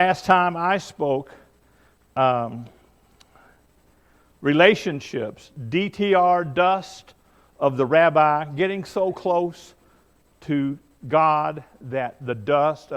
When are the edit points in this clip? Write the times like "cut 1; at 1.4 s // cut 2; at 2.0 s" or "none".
none